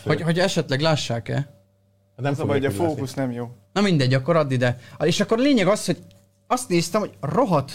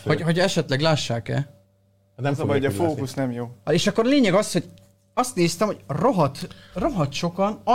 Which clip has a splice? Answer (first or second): second